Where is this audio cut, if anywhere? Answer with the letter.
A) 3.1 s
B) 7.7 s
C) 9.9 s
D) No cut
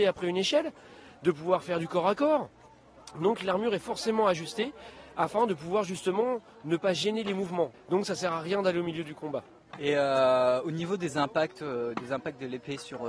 B